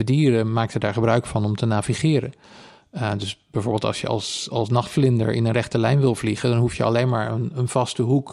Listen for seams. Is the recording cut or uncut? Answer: uncut